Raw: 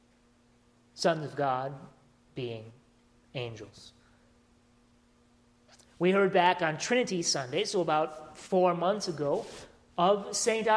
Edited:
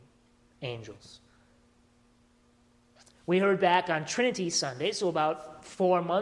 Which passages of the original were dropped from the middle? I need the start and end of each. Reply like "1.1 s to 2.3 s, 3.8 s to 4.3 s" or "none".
none